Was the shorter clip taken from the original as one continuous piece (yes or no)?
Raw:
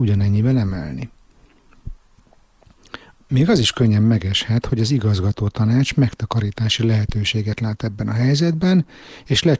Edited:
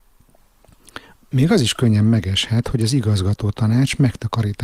yes